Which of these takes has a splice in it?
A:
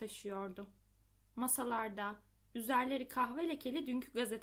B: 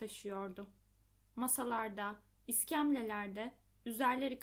A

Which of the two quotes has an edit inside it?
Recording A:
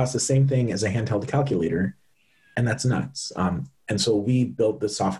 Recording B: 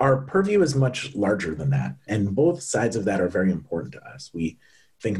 B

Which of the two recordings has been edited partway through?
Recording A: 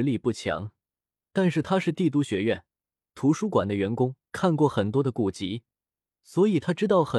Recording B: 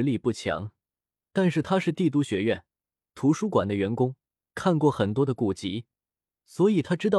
A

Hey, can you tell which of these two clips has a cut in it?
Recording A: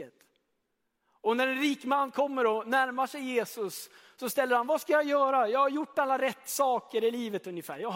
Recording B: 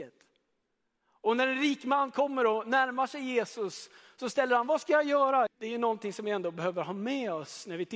B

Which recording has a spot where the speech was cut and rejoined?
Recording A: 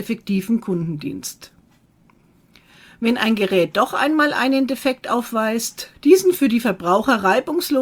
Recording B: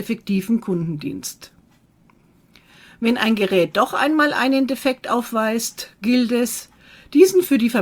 A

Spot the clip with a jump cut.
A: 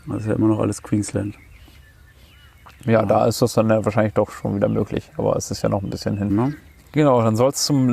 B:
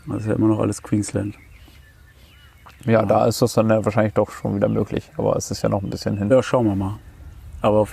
A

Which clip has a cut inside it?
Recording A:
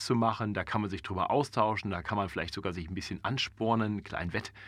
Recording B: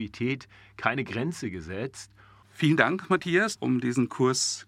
B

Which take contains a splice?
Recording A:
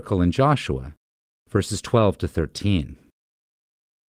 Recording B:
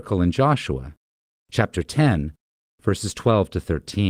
A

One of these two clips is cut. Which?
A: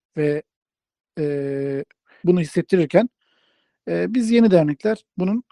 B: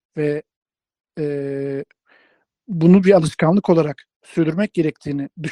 A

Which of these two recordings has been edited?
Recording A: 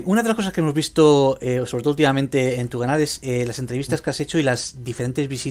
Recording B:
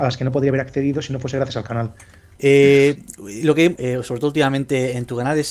B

